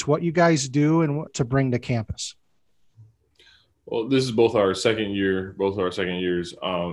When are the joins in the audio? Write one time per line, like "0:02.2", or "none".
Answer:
0:01.3